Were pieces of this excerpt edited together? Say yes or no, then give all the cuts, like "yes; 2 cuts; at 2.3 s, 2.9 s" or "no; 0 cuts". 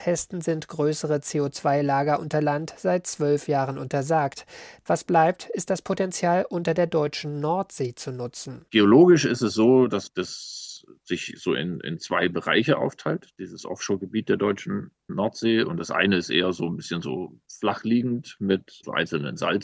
no; 0 cuts